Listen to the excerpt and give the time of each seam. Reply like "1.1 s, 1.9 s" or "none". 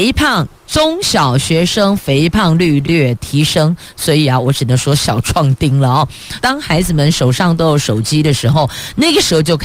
2.8 s, 6.4 s